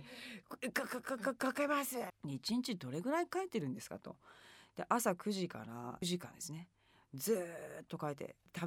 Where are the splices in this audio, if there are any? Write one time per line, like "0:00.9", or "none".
0:02.1
0:06.0